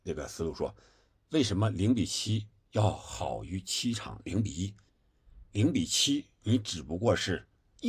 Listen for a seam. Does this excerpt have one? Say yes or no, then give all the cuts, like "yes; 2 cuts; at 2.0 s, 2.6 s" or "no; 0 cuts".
no; 0 cuts